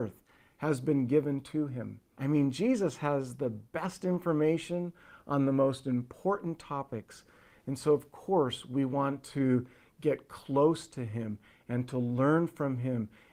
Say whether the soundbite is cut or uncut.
cut